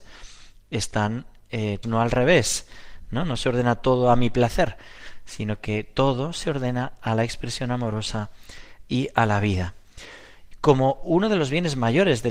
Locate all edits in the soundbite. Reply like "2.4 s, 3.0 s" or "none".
1.8 s